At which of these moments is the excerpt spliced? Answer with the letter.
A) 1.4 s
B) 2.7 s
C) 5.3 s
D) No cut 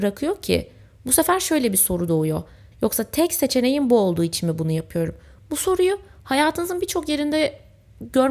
B